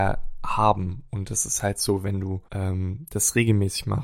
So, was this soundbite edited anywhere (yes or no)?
yes